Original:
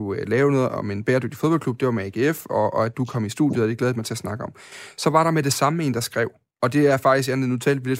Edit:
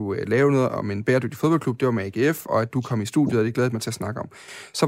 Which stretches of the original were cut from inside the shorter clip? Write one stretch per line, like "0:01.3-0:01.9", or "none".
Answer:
0:02.5-0:02.7